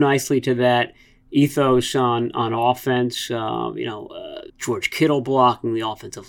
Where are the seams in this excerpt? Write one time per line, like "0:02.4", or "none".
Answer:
0:04.5